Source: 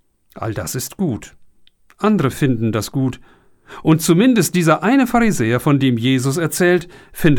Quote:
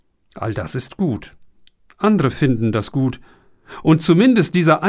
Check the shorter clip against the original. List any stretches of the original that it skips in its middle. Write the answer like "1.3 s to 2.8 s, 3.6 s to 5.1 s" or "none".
none